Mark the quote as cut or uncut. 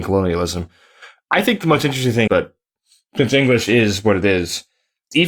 cut